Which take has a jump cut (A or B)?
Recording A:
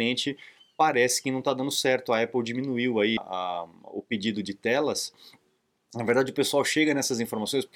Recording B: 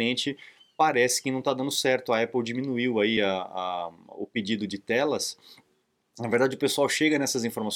A